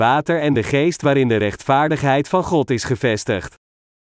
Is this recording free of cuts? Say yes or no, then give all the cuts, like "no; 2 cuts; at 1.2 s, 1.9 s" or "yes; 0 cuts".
yes; 0 cuts